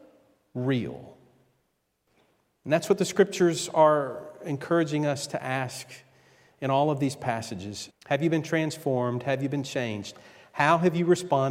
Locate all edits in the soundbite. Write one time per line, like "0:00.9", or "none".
0:07.9